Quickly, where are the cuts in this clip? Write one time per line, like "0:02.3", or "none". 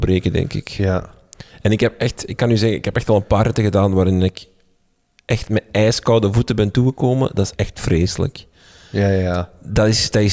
0:07.5